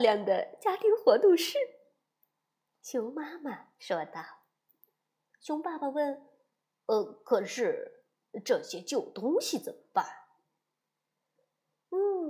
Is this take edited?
no; 0 cuts

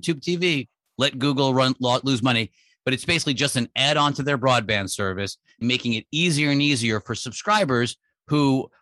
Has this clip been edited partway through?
yes; 1 cut; at 5.6 s

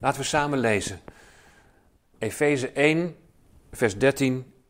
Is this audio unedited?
yes; 0 cuts

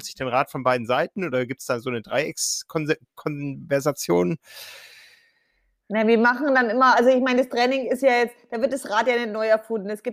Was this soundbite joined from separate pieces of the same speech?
no; 0 cuts

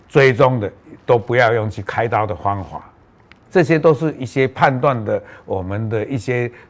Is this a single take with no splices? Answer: no; 1 cut; at 3.5 s

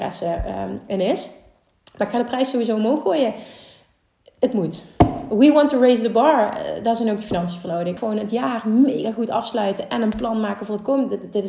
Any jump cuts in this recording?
yes; 1 cut; at 8.0 s

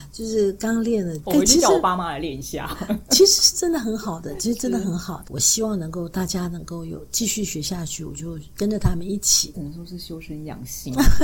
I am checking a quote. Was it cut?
yes; 3 cuts; at 1.2 s, 5.2 s, 9.5 s

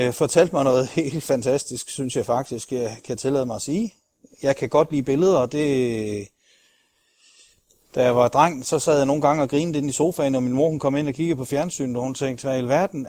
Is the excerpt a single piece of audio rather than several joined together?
yes; 0 cuts

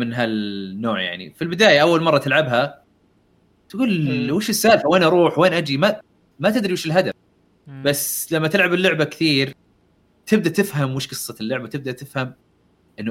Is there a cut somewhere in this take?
no; 0 cuts

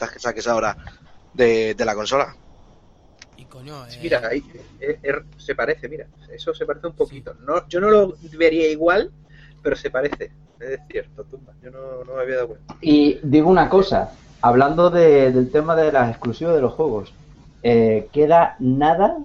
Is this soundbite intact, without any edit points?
yes; 0 cuts

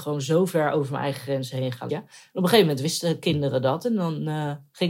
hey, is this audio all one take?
no; 1 cut; at 1.9 s

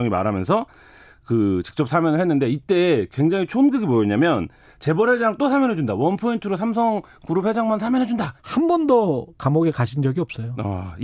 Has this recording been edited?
yes; 1 cut; at 8.4 s

